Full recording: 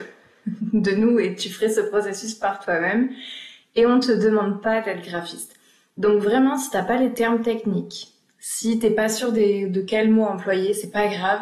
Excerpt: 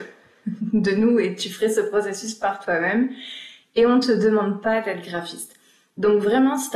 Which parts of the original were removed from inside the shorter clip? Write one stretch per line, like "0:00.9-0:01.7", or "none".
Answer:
none